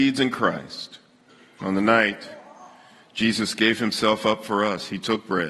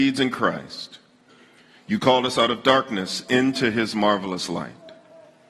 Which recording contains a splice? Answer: first; 1 cut; at 1.6 s

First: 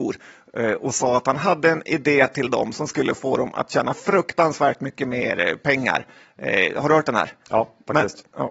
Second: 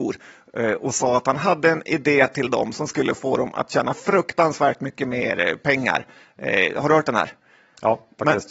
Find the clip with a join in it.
first; 1 cut; at 7.4 s

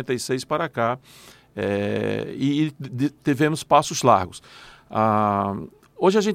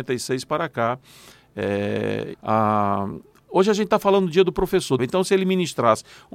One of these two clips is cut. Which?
second; 2 cuts; at 2.3 s, 5.0 s

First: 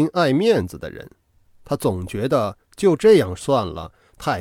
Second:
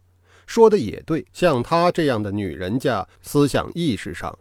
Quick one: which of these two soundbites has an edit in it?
second; 2 cuts; at 1.3 s, 3.2 s

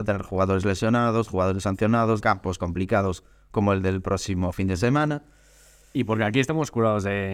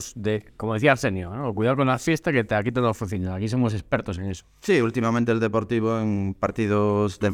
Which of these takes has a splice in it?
first; 1 cut; at 2.2 s

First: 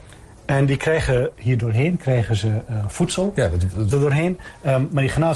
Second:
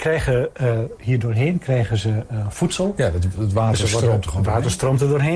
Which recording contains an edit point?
first; 2 cuts; at 1.3 s, 3.9 s

